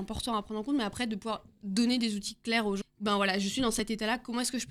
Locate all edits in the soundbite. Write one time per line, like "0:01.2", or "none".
0:02.8